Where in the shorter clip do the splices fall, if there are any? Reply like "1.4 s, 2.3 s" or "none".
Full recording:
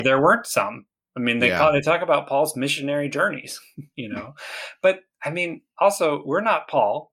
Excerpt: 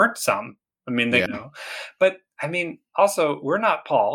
1.3 s